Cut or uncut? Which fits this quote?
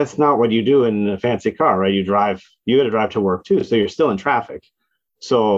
uncut